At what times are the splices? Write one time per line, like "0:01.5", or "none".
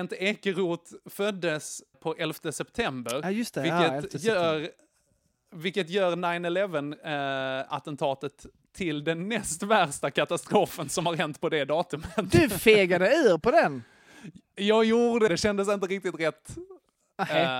0:01.9
0:15.3